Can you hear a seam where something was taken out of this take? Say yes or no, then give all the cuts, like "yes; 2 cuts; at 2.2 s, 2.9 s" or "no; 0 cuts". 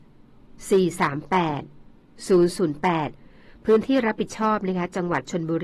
no; 0 cuts